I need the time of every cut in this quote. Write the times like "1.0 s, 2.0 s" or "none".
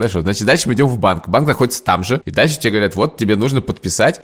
none